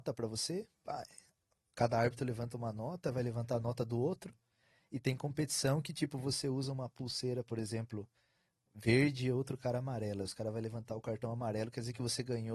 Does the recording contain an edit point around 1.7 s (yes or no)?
no